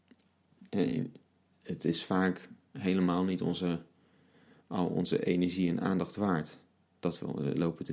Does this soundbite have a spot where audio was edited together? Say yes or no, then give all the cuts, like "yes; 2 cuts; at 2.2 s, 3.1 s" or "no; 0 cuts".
no; 0 cuts